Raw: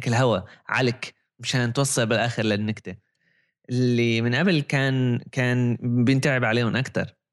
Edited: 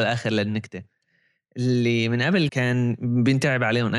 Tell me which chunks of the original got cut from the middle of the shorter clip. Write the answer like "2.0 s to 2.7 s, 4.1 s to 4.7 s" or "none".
4.6 s to 5.3 s